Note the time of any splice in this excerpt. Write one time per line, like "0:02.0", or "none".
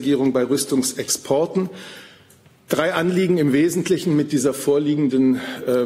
none